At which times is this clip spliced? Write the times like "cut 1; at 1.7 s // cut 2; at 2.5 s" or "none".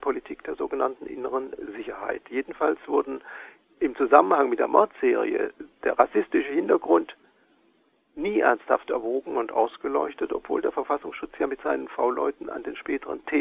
none